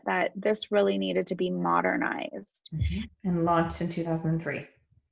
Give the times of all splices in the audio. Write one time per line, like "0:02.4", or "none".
0:03.1